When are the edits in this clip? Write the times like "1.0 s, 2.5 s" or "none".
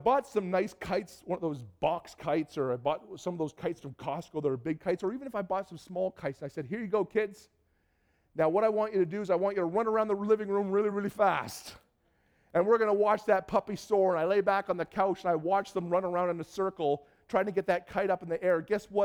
10.9 s